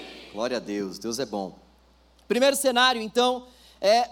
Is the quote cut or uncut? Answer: uncut